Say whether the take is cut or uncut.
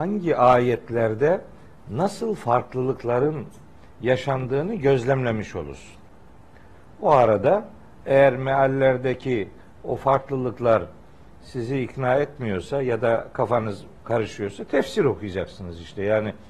uncut